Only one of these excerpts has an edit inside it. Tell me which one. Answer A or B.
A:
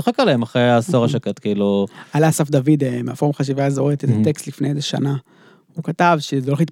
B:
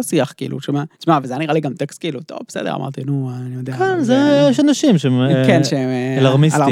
B